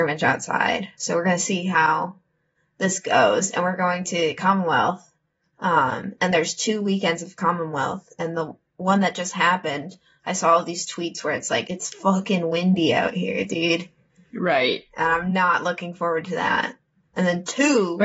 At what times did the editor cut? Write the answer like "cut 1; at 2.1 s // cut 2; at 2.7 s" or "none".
cut 1; at 11.6 s